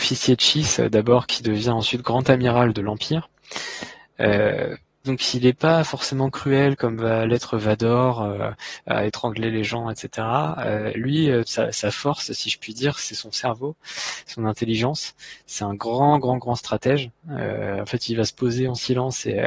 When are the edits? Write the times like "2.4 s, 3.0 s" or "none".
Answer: 11.4 s